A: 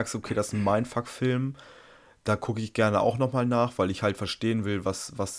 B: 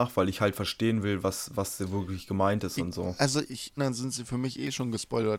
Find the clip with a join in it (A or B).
B